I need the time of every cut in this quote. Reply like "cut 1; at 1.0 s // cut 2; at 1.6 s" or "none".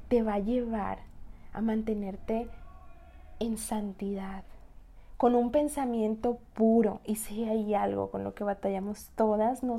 none